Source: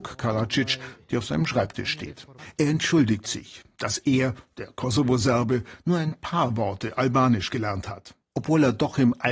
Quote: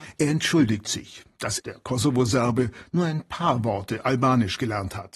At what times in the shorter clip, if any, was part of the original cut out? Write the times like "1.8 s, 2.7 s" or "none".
1.6 s